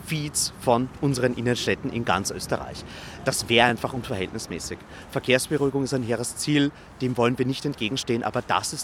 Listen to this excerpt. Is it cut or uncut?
uncut